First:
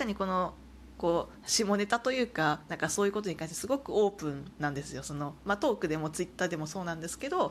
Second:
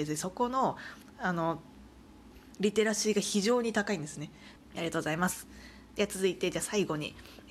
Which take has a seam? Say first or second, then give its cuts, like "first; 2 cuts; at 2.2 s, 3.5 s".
second; 1 cut; at 4.6 s